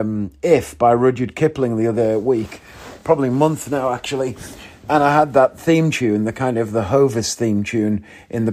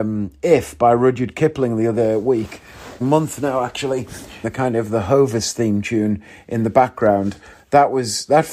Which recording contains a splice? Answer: second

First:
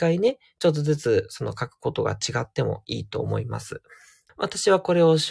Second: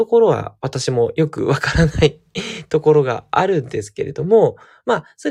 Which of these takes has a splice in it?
first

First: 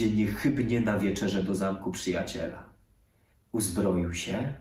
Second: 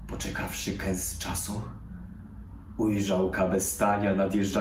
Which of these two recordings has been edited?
first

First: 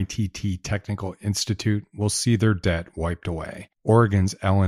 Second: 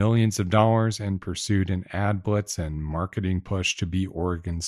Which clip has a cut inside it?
first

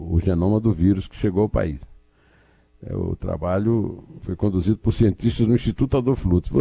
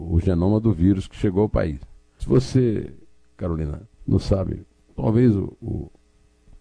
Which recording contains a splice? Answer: second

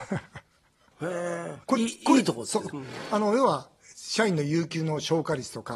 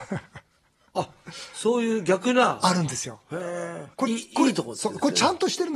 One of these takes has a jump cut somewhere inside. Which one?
first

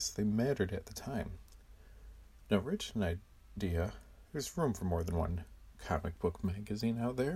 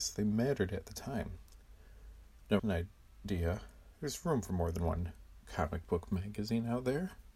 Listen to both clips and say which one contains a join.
second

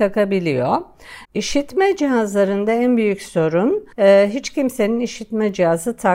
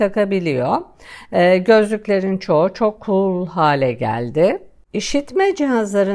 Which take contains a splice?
first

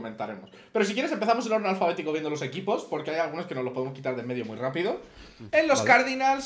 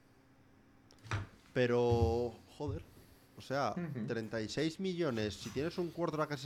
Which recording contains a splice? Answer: first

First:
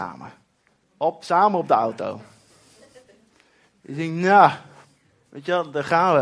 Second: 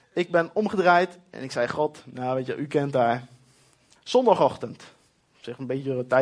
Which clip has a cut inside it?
second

